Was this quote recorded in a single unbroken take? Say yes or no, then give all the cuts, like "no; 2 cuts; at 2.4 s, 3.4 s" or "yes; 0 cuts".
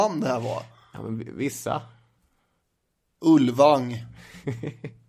yes; 0 cuts